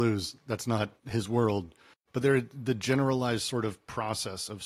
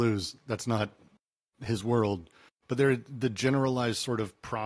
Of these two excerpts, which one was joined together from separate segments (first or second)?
first